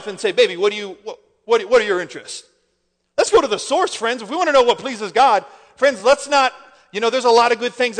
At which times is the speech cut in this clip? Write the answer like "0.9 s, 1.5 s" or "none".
none